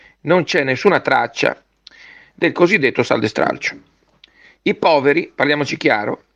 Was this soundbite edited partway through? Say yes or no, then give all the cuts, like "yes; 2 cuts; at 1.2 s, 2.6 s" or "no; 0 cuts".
no; 0 cuts